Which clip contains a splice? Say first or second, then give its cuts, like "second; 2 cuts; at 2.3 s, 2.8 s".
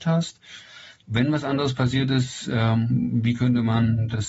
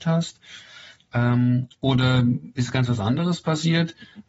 first; 1 cut; at 1.0 s